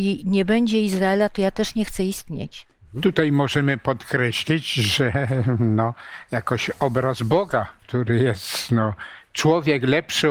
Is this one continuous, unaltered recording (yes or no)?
no